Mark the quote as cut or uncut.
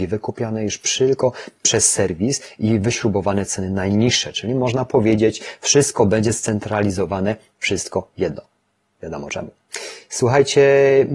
uncut